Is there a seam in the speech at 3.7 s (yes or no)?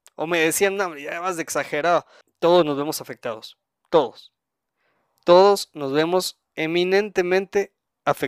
no